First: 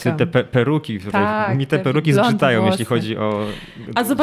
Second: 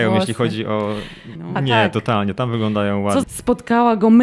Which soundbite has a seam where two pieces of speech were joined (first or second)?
second